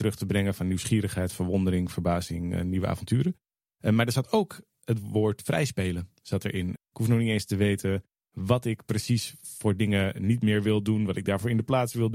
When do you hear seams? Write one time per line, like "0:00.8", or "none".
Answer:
0:06.8